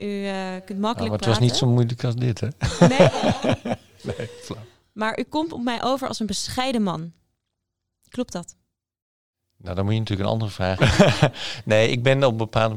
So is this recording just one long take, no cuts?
no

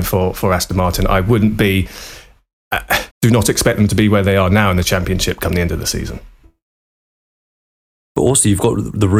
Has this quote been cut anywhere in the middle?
yes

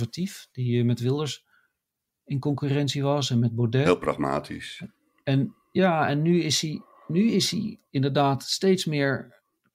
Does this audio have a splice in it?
no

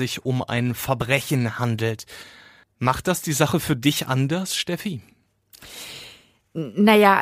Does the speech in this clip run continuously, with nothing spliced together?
yes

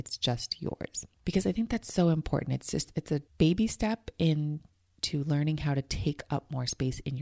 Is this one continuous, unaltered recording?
no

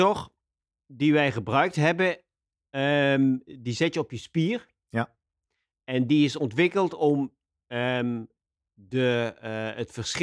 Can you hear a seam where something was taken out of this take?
no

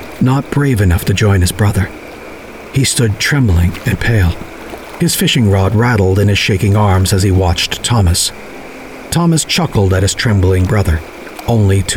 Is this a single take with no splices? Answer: yes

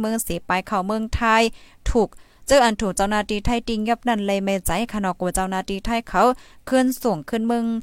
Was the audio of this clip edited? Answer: no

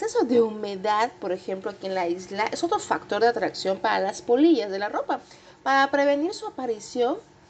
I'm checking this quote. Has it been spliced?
no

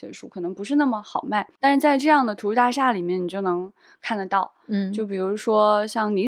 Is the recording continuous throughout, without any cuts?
yes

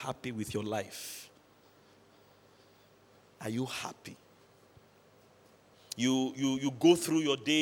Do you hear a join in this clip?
no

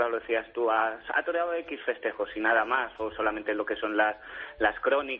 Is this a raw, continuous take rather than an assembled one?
yes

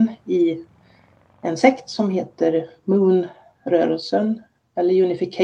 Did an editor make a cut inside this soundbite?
no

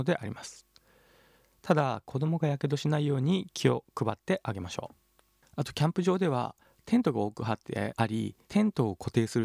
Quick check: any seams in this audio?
yes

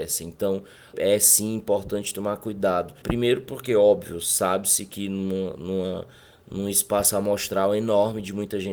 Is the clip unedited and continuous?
no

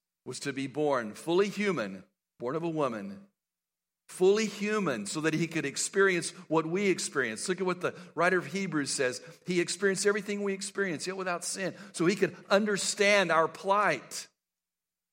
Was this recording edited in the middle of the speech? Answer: no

